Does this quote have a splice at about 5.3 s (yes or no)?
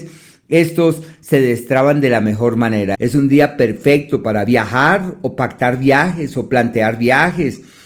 no